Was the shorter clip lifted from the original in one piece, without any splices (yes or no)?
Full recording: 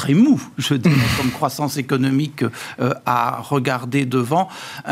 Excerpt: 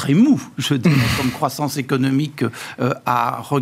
yes